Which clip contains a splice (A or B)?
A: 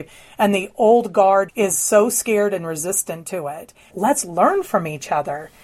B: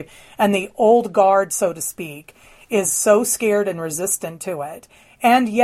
A